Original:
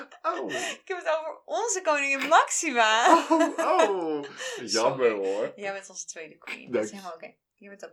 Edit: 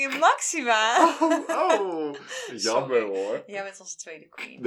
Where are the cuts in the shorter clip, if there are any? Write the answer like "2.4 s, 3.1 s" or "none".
none